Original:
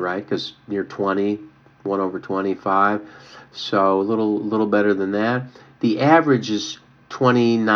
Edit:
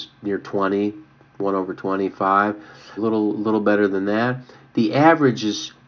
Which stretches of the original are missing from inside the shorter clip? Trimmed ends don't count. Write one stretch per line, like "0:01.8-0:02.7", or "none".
0:03.4-0:04.0